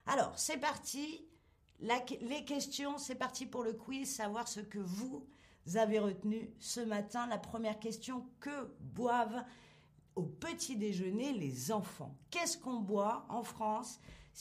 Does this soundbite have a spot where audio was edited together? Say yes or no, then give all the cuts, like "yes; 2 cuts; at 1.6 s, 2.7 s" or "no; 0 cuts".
no; 0 cuts